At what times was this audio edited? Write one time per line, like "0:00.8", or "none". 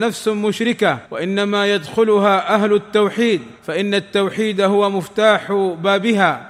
0:01.0
0:03.6